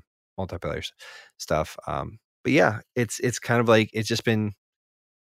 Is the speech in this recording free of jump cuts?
yes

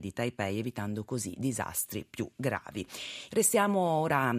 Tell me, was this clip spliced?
yes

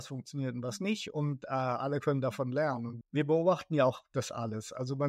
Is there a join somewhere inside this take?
yes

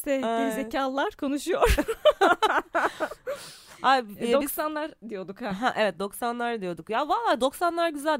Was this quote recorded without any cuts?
yes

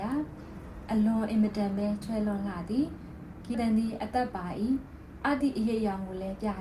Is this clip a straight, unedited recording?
no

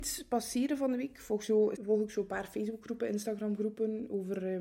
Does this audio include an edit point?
yes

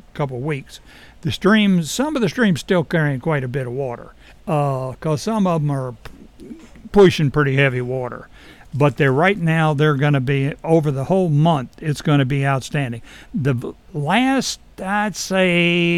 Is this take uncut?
no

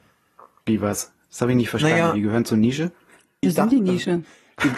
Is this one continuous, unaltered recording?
no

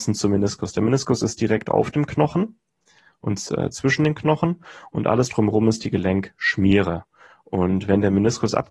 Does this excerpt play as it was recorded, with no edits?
yes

